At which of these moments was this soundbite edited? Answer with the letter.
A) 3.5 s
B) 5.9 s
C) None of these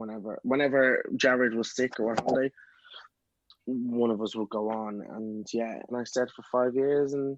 B